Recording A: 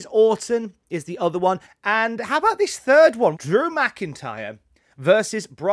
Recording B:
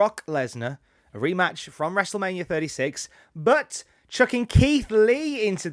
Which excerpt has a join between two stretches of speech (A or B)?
A